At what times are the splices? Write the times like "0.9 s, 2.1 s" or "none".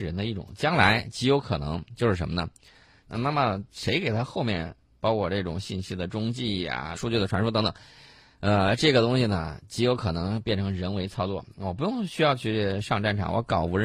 3.1 s, 7.0 s